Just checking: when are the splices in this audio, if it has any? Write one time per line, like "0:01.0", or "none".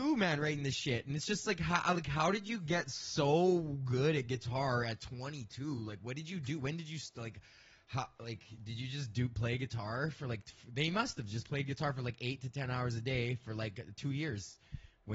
none